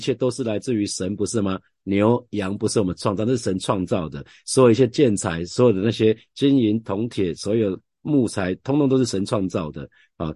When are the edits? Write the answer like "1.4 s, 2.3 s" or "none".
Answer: none